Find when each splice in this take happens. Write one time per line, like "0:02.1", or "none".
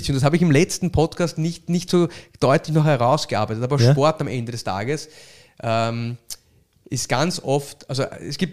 none